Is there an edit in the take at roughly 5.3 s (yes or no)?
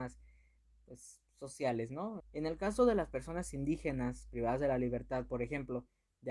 no